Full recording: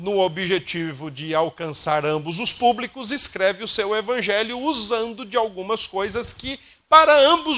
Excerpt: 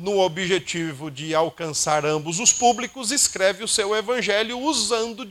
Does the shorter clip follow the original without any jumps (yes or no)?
yes